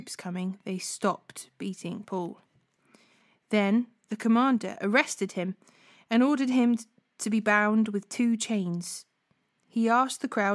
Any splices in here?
no; 0 cuts

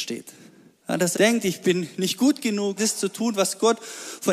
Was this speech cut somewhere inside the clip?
yes; 2 cuts; at 1.1 s, 2.8 s

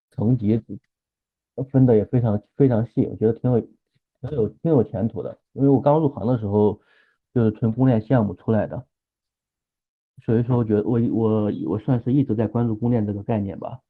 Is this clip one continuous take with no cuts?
yes; 0 cuts

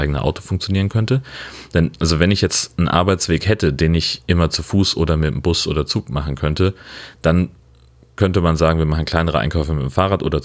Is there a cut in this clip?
no; 0 cuts

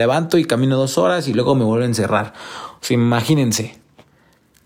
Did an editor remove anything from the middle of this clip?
no; 0 cuts

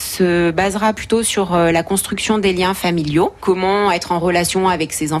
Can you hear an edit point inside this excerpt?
no; 0 cuts

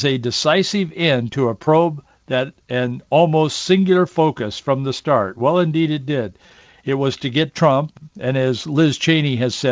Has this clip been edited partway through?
no; 0 cuts

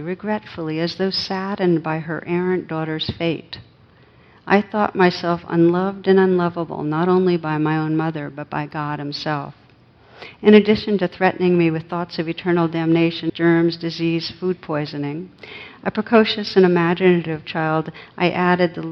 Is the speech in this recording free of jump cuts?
no; 1 cut; at 13.3 s

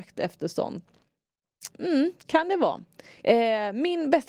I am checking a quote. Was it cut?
yes; 2 cuts; at 1.7 s, 3.2 s

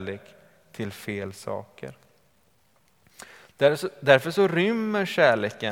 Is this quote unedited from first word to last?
yes; 0 cuts

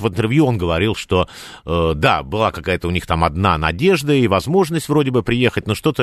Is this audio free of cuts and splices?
yes; 0 cuts

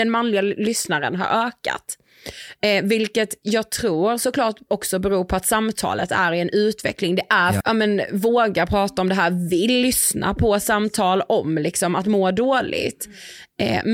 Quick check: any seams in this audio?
yes; 1 cut; at 7.6 s

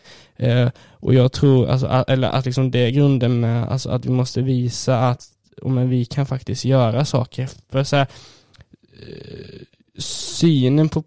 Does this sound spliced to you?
no; 0 cuts

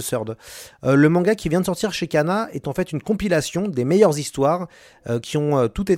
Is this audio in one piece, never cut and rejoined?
yes; 0 cuts

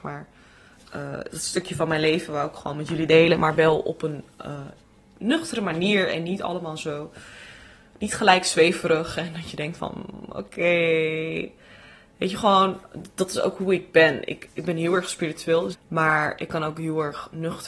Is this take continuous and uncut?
no; 2 cuts; at 14.5 s, 15.7 s

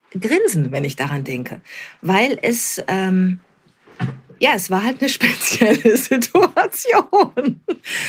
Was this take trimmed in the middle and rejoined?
no; 0 cuts

